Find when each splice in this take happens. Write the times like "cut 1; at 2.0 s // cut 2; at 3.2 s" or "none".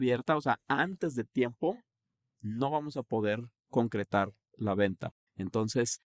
cut 1; at 5.3 s